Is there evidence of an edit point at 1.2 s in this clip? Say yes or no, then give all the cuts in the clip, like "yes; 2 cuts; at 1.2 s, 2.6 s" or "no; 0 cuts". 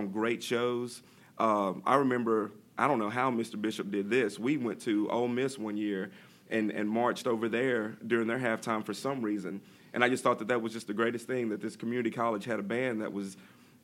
no; 0 cuts